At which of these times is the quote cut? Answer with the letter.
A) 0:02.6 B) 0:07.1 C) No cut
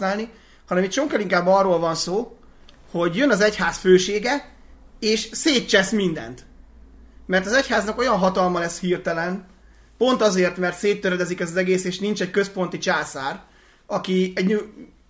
C